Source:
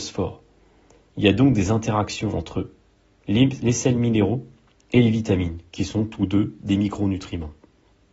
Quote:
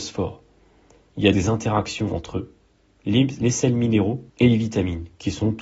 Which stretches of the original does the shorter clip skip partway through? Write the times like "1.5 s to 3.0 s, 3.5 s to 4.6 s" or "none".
1.3 s to 1.6 s, 4.5 s to 4.8 s